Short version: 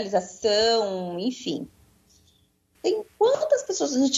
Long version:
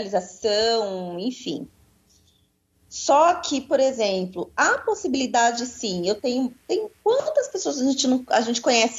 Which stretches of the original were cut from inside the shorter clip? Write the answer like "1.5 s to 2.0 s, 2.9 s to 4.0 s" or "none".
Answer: 2.7 s to 6.6 s